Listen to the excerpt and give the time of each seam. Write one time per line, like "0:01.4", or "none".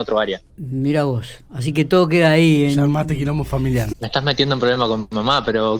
0:03.9

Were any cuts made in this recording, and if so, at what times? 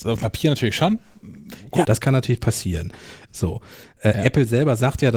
0:01.8
0:03.3

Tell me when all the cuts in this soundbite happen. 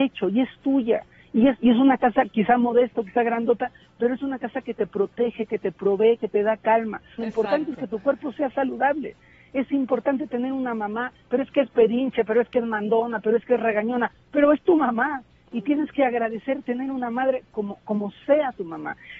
0:07.2

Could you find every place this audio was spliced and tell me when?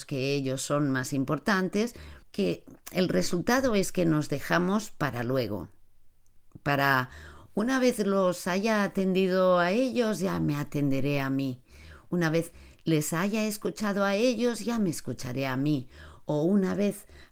0:02.2

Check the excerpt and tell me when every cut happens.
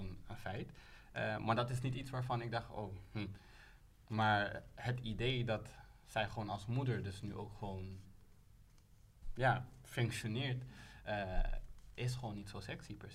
none

